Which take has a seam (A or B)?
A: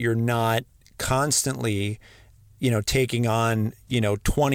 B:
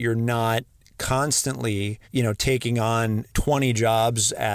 B